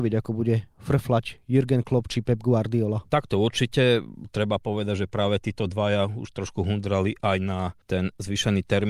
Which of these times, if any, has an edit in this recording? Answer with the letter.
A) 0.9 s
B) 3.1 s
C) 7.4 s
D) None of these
D